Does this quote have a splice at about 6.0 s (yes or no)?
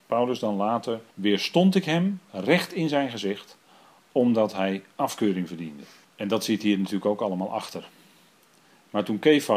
yes